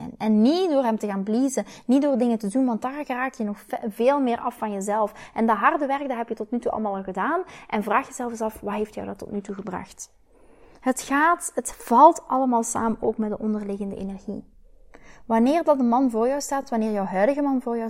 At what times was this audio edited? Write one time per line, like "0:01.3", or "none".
none